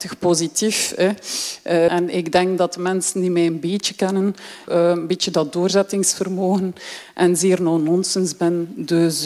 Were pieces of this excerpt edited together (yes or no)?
yes